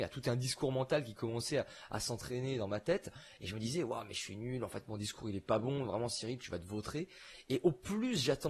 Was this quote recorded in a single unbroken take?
yes; 0 cuts

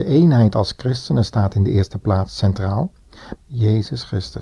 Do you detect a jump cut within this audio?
yes; 1 cut; at 3.3 s

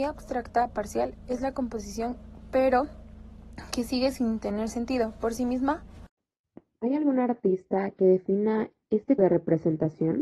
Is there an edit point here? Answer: yes; 1 cut; at 9.2 s

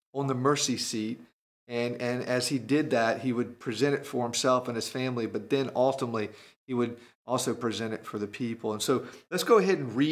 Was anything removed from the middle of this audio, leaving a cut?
no; 0 cuts

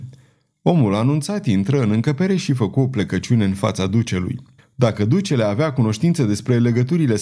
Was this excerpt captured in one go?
no; 1 cut; at 4.6 s

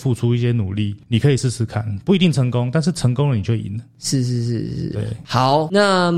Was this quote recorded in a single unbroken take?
yes; 0 cuts

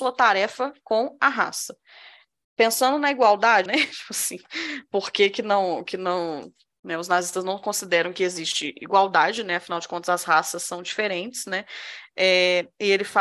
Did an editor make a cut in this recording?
yes; 1 cut; at 3.7 s

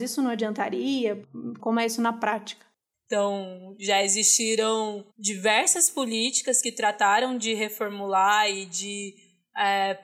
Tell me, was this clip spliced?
yes; 3 cuts; at 1.6 s, 2.9 s, 5.1 s

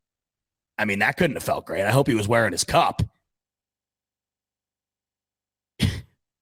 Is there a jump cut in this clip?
no; 0 cuts

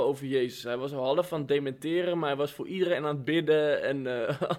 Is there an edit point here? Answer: no; 0 cuts

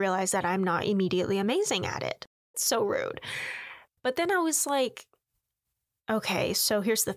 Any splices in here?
yes; 2 cuts; at 2.5 s, 4.0 s

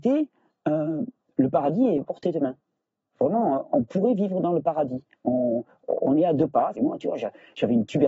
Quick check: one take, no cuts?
no; 2 cuts; at 2.0 s, 6.7 s

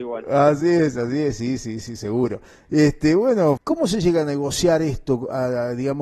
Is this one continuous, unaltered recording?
no; 1 cut; at 3.6 s

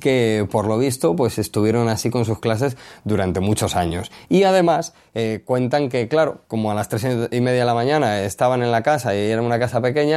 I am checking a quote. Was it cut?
no; 0 cuts

